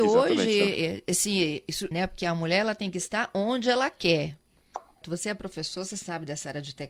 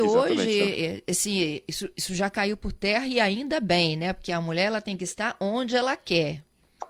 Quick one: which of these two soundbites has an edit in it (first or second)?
first